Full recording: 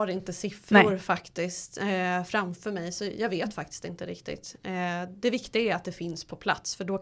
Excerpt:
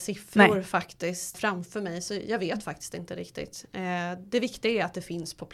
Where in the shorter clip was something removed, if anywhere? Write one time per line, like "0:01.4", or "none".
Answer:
0:01.3